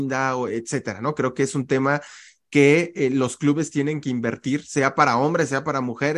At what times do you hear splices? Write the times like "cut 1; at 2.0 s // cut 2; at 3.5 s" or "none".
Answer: none